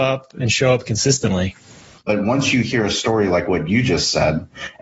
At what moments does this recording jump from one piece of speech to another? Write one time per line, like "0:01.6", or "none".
0:02.0